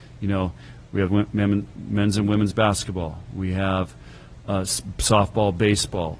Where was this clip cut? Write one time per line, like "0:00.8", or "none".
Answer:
0:01.1